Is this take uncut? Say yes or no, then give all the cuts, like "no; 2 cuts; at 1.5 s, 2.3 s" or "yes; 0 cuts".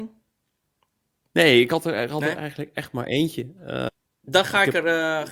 no; 1 cut; at 4.2 s